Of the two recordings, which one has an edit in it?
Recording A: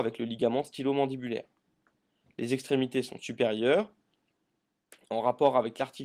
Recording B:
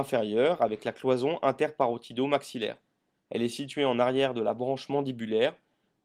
B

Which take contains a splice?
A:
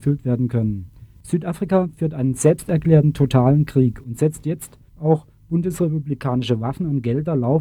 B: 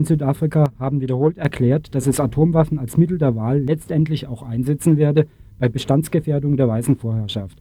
A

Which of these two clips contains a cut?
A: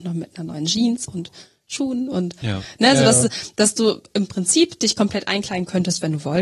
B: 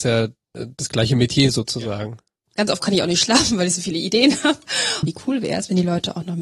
B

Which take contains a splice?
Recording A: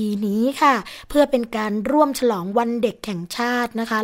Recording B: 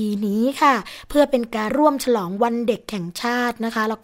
B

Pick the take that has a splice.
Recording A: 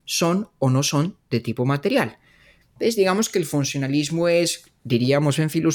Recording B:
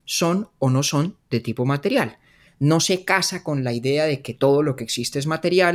B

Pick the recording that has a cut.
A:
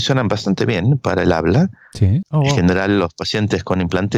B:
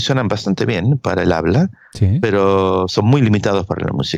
A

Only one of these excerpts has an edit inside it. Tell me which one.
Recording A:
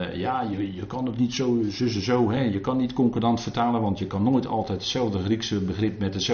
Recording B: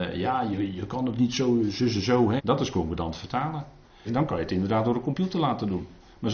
B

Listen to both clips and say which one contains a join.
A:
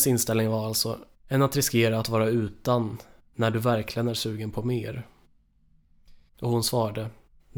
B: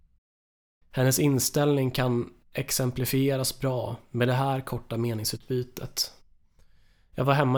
A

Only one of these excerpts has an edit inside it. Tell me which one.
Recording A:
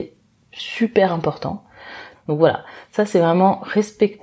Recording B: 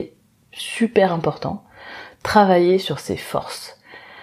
A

